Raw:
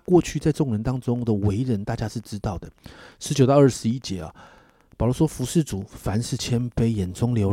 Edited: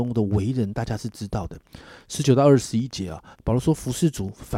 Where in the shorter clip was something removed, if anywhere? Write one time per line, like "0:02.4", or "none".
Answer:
0:03.3